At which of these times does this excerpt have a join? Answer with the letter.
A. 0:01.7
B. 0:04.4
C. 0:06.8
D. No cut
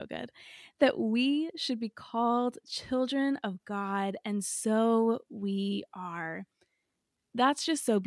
D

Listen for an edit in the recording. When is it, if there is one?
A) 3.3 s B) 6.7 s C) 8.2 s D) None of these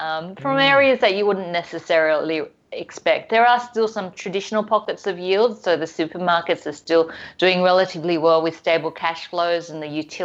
D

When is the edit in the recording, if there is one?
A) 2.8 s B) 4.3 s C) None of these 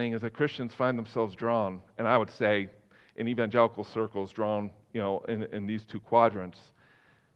C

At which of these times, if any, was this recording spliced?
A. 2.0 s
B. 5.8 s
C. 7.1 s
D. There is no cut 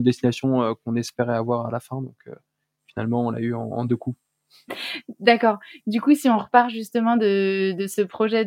D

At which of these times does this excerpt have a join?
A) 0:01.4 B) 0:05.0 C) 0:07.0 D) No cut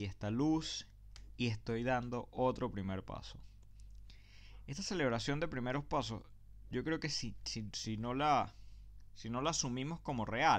D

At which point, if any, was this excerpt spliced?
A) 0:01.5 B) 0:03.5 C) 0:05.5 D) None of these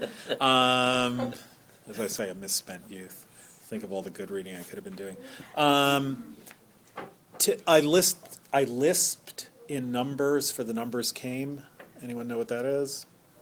D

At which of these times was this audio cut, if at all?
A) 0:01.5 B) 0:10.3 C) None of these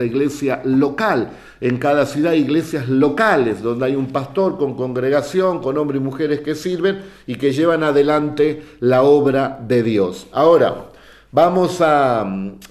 B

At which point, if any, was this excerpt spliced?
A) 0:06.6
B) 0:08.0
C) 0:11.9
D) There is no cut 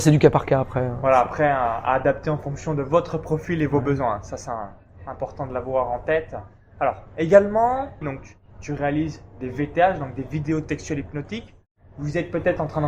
B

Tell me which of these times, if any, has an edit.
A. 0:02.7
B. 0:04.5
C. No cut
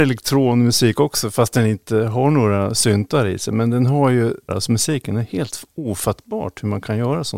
B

